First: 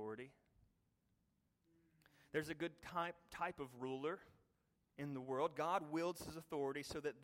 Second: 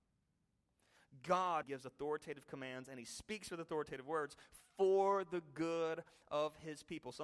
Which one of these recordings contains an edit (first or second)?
second